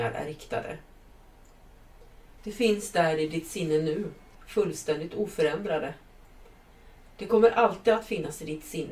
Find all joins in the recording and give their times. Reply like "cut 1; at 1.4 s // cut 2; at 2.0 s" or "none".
cut 1; at 2.4 s